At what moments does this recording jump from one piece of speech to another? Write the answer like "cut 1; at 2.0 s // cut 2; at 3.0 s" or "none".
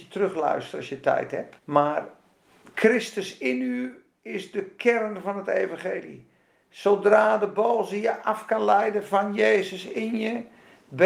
cut 1; at 1.6 s